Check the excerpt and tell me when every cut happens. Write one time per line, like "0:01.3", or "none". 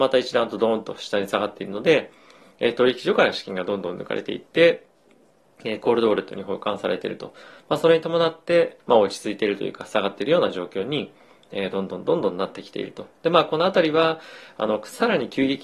0:08.8